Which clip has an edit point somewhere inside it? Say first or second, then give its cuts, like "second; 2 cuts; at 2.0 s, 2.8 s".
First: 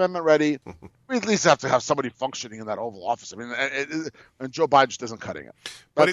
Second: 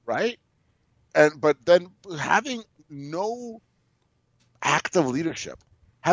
first; 1 cut; at 0.9 s